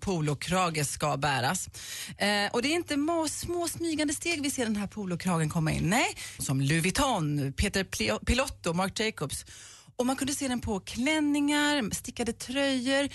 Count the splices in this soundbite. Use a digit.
1